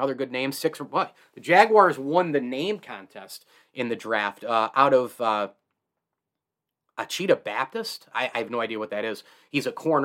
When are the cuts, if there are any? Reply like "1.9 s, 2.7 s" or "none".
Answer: none